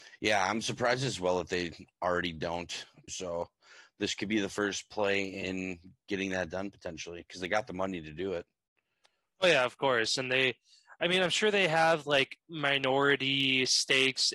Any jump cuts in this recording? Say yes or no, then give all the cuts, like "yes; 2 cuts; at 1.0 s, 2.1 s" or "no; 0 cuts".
yes; 1 cut; at 3.1 s